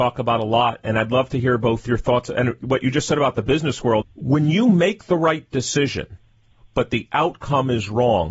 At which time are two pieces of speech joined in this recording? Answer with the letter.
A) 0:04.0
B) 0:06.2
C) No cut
A